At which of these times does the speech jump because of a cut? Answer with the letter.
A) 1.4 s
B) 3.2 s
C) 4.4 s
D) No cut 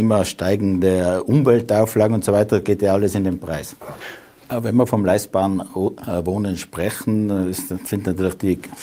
C